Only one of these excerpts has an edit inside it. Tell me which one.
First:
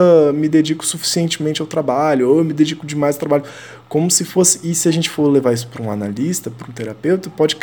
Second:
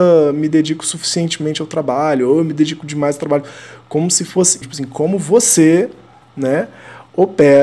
second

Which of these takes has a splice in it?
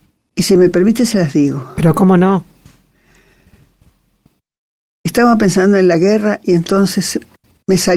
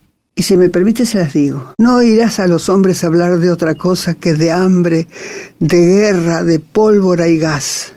second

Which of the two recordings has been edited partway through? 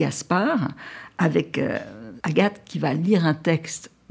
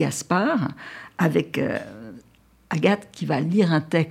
first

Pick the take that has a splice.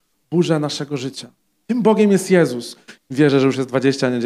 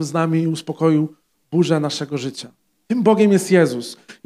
first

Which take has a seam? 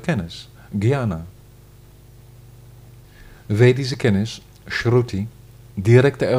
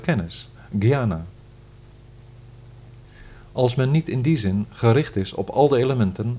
first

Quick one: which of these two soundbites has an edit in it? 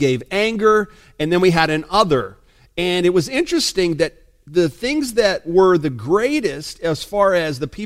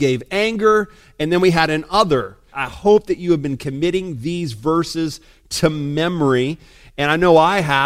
second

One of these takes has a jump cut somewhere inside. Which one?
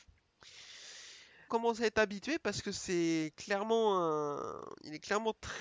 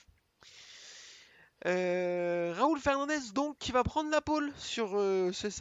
first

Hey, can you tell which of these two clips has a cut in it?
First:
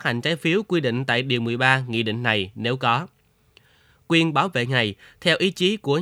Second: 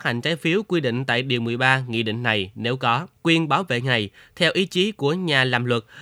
second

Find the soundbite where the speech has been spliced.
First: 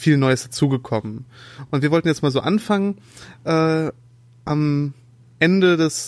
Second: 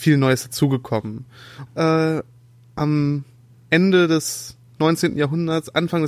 second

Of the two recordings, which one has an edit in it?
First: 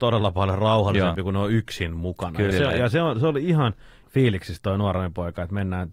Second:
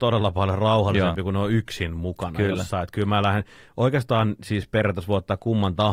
first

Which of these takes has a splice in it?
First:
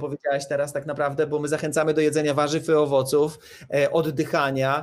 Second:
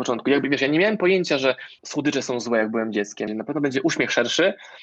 second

